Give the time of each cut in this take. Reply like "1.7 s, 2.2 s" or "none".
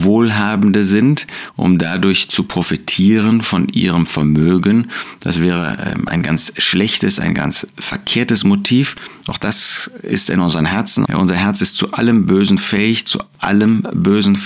11.1 s